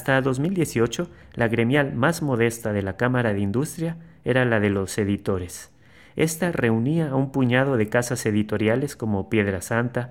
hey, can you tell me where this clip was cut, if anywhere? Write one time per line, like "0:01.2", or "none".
none